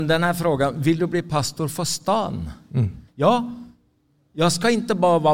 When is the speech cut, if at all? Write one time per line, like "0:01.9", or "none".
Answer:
0:03.1